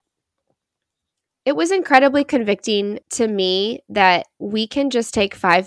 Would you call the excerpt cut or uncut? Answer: cut